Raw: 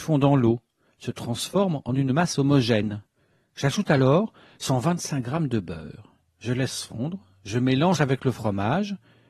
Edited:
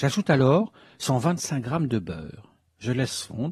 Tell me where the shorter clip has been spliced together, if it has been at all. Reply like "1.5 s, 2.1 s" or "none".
none